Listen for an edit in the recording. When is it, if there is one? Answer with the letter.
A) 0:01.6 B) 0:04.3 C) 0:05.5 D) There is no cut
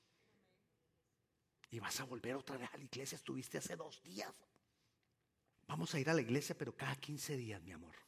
C